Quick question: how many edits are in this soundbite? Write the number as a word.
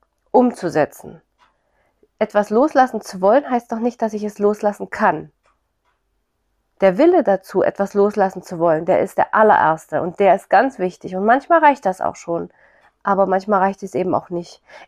zero